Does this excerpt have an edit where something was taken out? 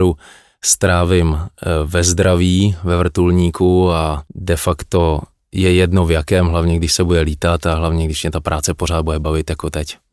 yes; 1 cut; at 4.3 s

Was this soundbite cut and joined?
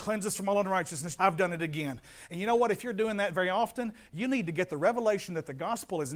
yes; 1 cut; at 1.2 s

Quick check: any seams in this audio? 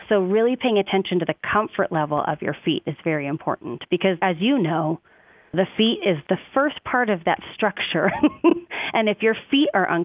no; 0 cuts

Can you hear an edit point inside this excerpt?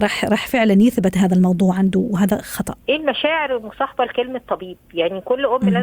yes; 1 cut; at 2.8 s

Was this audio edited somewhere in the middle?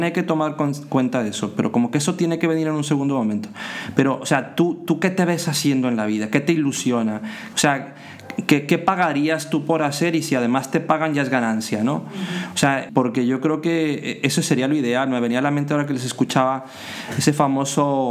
yes; 2 cuts; at 7.5 s, 12.9 s

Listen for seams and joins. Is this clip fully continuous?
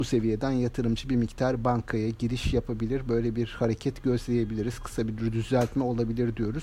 yes; 0 cuts

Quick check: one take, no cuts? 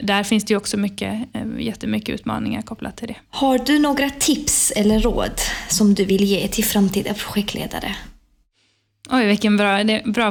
yes; 0 cuts

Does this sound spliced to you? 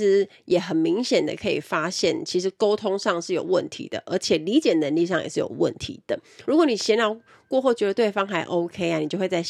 yes; 1 cut; at 6.4 s

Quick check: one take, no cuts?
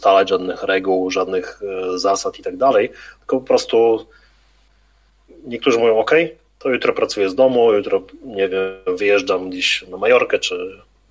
yes; 0 cuts

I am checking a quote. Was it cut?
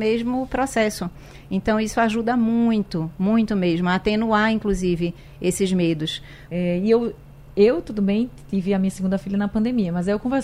yes; 1 cut; at 6.5 s

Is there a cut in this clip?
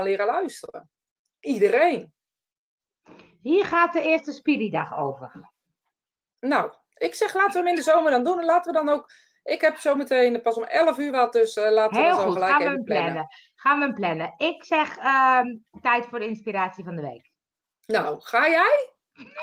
no; 0 cuts

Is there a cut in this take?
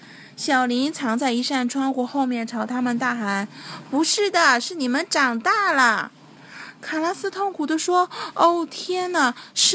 no; 0 cuts

